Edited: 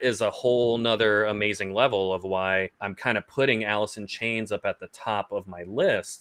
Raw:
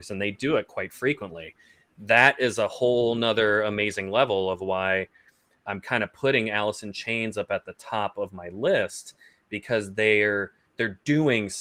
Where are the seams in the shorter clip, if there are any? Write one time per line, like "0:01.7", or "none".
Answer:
0:02.7